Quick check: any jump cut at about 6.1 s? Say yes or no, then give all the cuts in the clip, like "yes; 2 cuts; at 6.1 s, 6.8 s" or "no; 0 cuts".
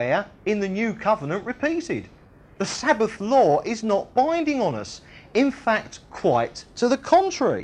no; 0 cuts